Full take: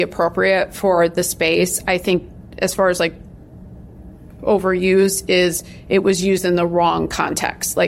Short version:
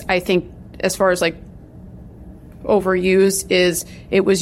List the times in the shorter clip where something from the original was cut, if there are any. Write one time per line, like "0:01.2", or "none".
none

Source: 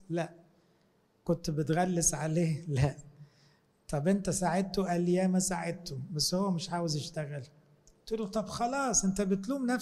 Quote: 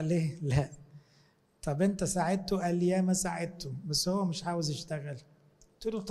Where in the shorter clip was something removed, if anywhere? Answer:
none

